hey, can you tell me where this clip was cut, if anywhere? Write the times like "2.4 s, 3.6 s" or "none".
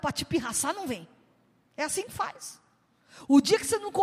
none